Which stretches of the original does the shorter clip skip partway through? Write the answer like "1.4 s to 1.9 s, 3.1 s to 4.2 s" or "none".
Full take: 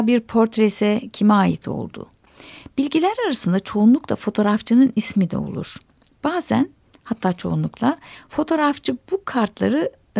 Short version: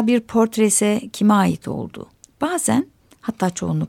2.2 s to 6.1 s